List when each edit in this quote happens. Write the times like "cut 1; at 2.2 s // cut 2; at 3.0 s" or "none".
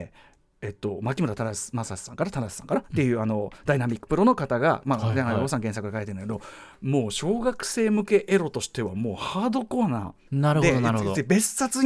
cut 1; at 10.3 s